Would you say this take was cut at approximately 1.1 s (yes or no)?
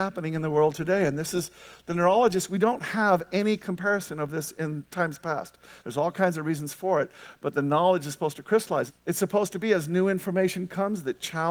no